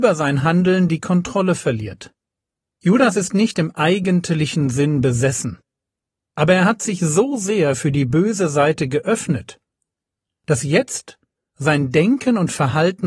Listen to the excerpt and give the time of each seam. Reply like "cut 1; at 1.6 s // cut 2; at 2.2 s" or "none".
cut 1; at 2.8 s